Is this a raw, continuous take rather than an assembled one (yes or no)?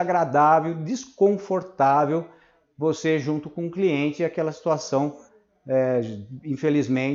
yes